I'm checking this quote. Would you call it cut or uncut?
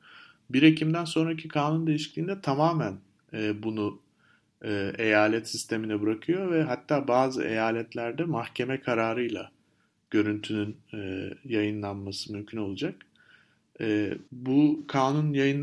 cut